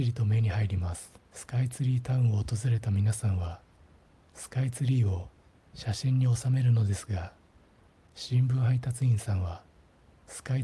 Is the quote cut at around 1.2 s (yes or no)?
yes